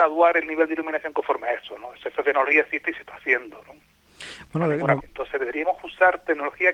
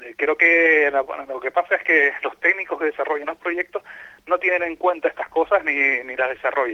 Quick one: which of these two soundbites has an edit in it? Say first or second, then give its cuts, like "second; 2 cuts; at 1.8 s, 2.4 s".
first; 1 cut; at 5.0 s